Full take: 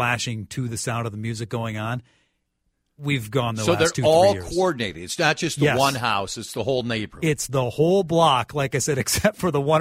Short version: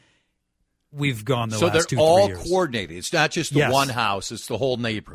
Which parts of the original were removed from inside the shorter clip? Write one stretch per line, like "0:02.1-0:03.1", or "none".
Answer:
none